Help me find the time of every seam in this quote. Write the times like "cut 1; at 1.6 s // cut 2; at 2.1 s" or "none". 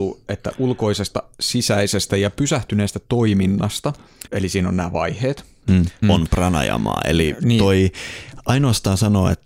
cut 1; at 4.3 s // cut 2; at 6.0 s